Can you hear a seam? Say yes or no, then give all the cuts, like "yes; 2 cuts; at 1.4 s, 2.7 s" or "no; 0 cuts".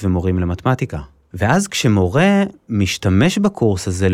yes; 1 cut; at 1.3 s